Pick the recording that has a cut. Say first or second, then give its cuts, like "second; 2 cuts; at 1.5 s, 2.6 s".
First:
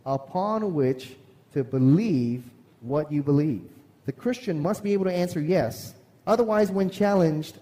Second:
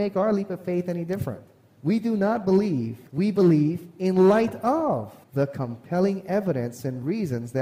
second; 2 cuts; at 3.1 s, 5.2 s